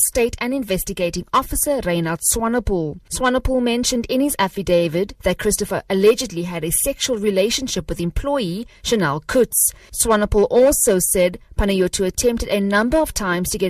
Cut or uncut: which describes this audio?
uncut